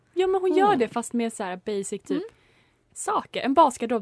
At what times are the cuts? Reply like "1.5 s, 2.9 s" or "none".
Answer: none